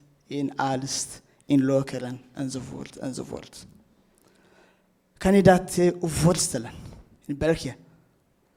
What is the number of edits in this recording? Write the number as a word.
zero